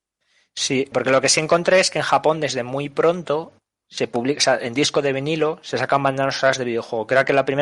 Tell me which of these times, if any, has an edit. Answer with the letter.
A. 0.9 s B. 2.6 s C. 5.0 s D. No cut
A